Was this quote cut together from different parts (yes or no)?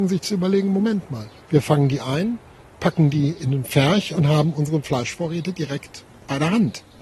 no